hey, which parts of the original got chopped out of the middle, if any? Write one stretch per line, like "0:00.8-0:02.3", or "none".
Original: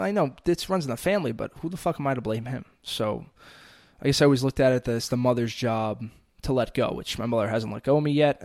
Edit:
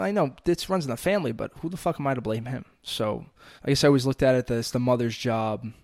0:03.6-0:03.9